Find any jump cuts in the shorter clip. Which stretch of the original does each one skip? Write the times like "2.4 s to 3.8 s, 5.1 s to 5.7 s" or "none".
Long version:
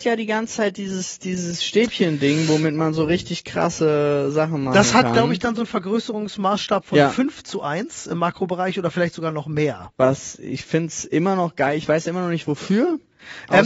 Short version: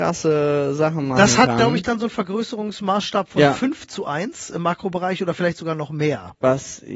none